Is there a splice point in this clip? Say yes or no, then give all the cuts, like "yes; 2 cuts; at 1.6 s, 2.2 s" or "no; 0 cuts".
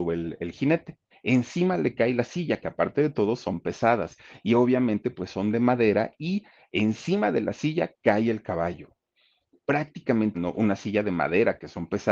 yes; 2 cuts; at 1.1 s, 10.3 s